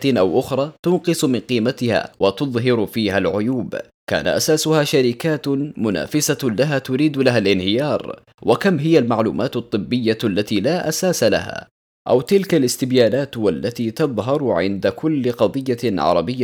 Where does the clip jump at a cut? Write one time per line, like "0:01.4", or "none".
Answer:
none